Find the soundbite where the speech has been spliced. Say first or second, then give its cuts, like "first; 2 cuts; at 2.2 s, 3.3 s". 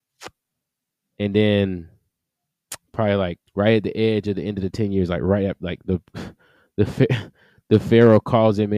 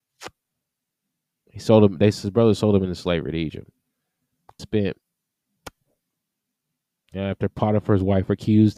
first; 2 cuts; at 1.1 s, 3.4 s